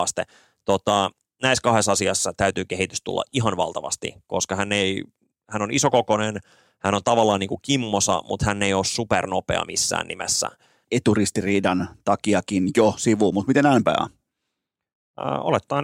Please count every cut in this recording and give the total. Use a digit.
1